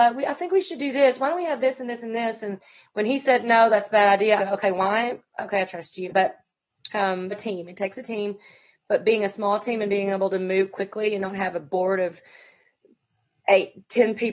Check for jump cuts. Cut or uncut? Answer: cut